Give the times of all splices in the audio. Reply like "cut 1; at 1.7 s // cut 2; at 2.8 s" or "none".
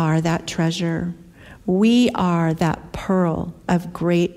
none